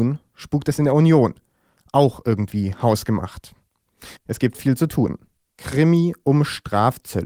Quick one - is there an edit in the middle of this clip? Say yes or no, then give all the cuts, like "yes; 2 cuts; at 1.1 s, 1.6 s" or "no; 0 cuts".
yes; 2 cuts; at 4.2 s, 5.5 s